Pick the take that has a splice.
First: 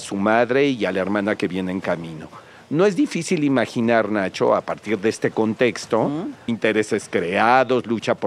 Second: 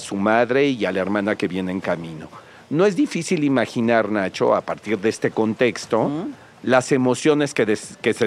first; 1 cut; at 6.5 s

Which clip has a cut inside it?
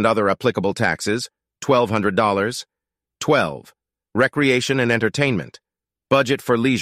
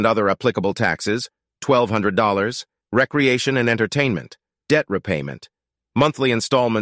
second; 2 cuts; at 2.8 s, 4.7 s

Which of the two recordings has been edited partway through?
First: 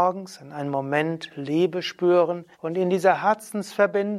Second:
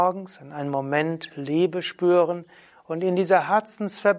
first; 1 cut; at 2.5 s

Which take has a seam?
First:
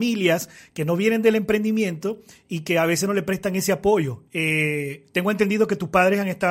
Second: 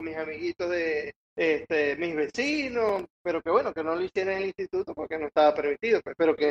first; 1 cut; at 4.3 s

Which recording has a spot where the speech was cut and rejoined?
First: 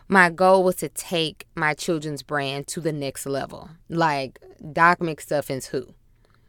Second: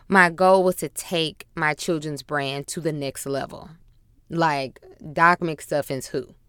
first; 1 cut; at 3.8 s

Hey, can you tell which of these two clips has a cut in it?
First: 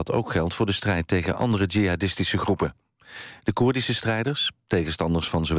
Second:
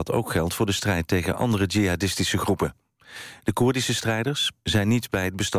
second; 1 cut; at 4.6 s

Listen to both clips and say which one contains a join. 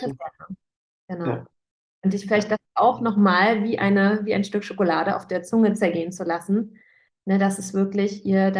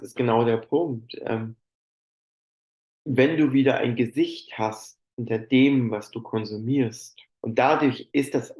second; 1 cut; at 7.3 s

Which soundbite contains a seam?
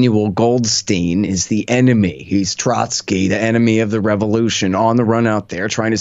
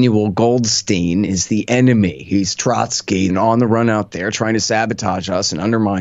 second; 1 cut; at 3.3 s

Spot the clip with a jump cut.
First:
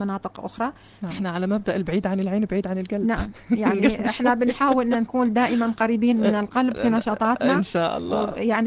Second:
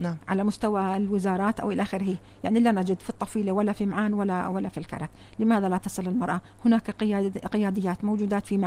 first; 1 cut; at 1.1 s

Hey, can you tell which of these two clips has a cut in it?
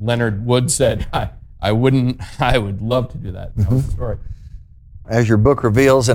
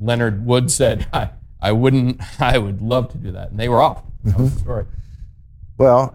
first; 2 cuts; at 3.5 s, 5.0 s

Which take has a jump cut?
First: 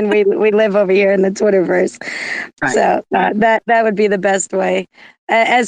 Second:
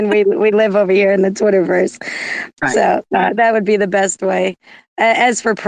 second; 1 cut; at 3.3 s

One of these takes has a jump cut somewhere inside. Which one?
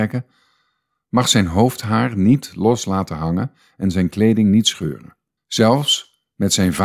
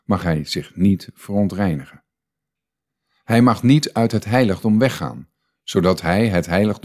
first; 1 cut; at 5.4 s

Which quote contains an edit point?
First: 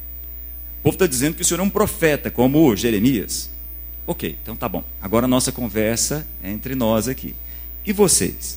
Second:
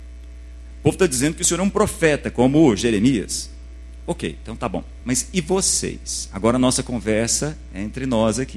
first; 1 cut; at 5.0 s

